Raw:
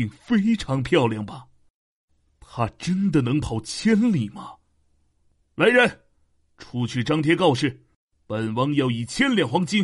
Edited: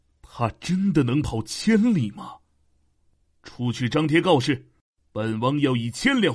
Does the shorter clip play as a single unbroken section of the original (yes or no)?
no